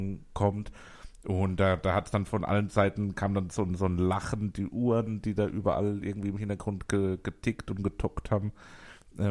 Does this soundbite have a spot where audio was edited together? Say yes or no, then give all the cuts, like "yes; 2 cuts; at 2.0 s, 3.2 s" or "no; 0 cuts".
no; 0 cuts